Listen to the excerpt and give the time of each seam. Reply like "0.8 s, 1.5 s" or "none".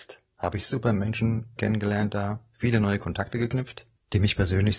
1.6 s